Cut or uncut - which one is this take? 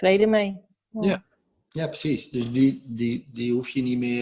uncut